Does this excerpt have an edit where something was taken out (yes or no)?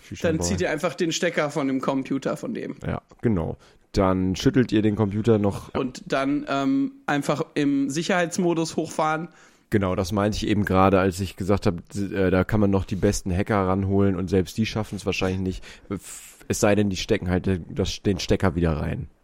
yes